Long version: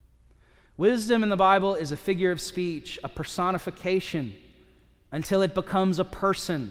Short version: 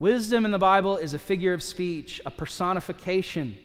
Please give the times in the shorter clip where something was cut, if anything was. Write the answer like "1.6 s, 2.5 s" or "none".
none